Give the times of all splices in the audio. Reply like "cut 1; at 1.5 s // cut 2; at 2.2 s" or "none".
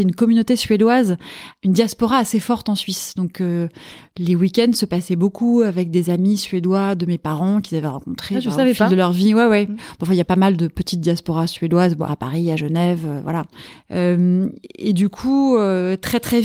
cut 1; at 12.1 s